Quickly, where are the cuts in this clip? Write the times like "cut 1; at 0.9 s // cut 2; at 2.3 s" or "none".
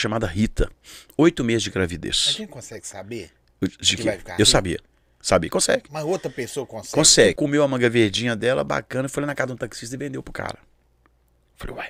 cut 1; at 7.4 s